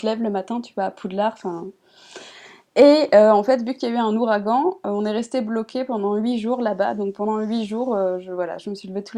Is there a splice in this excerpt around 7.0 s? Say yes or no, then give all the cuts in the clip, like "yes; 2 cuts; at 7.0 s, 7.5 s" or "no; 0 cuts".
no; 0 cuts